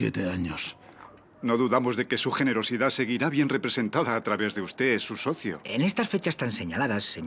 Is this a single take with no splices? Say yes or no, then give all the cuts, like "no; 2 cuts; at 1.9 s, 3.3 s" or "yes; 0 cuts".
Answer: no; 1 cut; at 1.2 s